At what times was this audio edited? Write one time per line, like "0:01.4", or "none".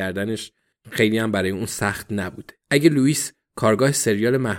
0:02.6